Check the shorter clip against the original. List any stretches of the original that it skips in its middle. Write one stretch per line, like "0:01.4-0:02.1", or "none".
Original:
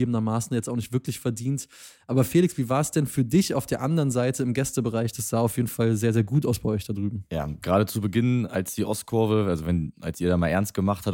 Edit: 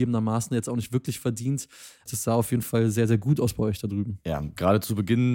0:02.1-0:05.1